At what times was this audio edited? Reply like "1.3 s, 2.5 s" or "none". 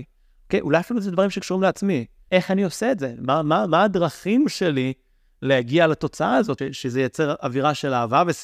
2.3 s, 6.6 s